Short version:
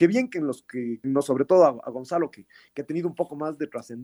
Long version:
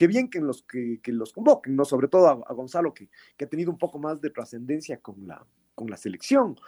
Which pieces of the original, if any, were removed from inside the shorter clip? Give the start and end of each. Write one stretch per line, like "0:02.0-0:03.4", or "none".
0:01.0-0:01.7